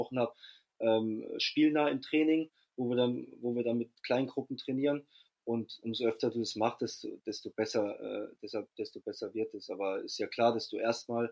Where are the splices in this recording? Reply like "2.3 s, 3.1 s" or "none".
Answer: none